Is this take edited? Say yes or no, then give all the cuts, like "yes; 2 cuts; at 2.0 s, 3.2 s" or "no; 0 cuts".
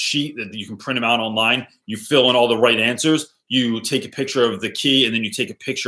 no; 0 cuts